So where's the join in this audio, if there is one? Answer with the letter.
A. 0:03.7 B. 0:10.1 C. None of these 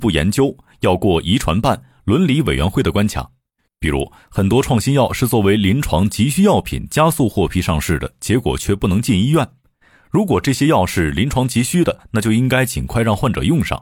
A